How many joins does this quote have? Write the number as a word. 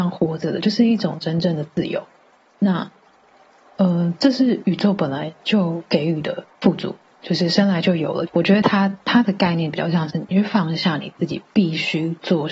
one